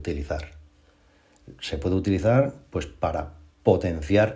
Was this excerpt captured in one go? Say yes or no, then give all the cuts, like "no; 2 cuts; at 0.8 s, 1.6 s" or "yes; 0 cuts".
yes; 0 cuts